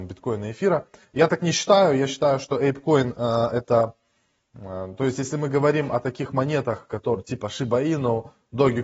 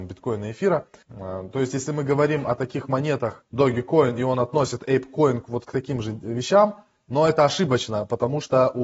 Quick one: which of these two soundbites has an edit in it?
second; 2 cuts; at 1.0 s, 3.4 s

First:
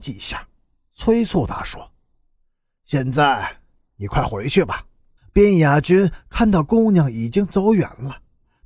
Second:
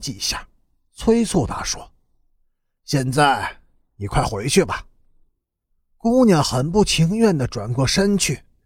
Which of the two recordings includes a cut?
first; 1 cut; at 5.2 s

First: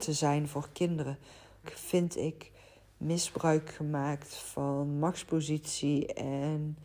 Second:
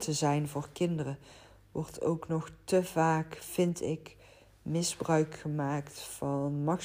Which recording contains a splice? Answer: first; 1 cut; at 1.6 s

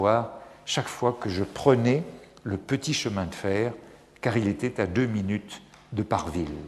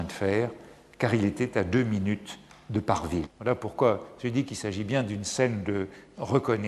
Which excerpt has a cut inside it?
second; 1 cut; at 3.2 s

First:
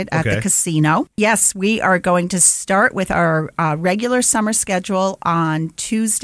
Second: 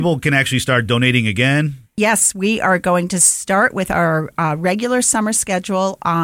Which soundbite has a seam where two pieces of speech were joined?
first; 1 cut; at 1.1 s

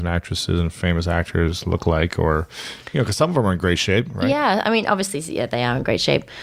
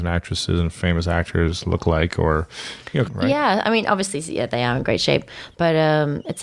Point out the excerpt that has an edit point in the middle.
second; 1 cut; at 3.0 s

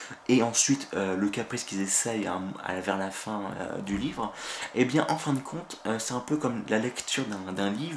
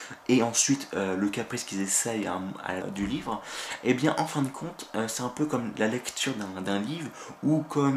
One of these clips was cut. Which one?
second; 1 cut; at 2.8 s

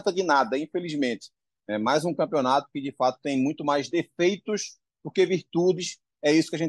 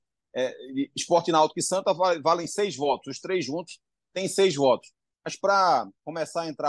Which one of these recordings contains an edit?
second; 1 cut; at 5.1 s

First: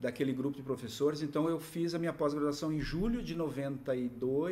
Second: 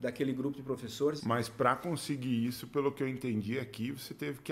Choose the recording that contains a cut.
second; 1 cut; at 1.2 s

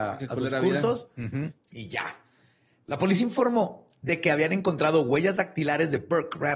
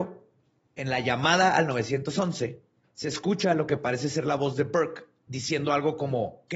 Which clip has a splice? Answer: first; 1 cut; at 1.6 s

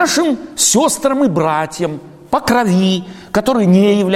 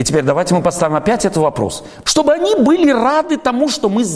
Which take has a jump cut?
second; 1 cut; at 2.0 s

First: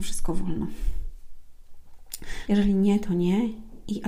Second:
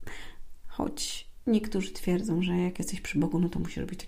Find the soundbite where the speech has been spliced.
first; 1 cut; at 2.5 s

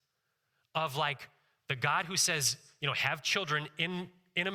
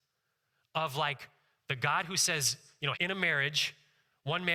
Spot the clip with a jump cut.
second; 1 cut; at 2.9 s

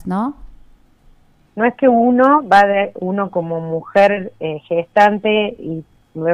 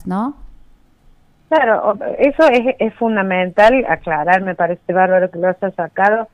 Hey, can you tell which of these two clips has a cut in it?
first; 1 cut; at 1.5 s

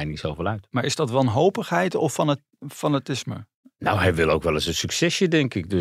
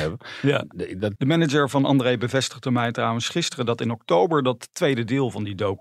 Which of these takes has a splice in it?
second; 1 cut; at 1.2 s

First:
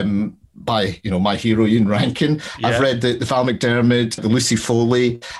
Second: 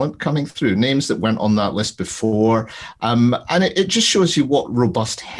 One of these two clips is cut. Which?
first; 1 cut; at 4.2 s

